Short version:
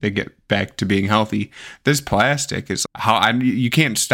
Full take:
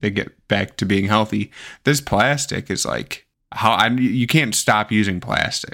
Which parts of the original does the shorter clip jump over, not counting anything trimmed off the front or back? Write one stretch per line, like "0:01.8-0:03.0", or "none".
0:02.9-0:03.4